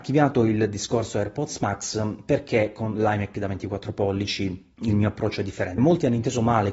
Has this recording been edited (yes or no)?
yes